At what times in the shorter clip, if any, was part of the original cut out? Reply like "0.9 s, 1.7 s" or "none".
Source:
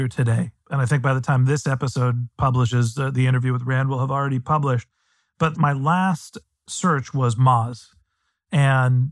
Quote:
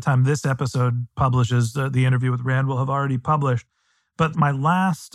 none